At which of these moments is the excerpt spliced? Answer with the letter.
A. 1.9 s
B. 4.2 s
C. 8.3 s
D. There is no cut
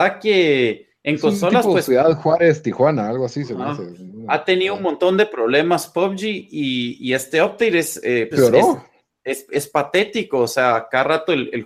C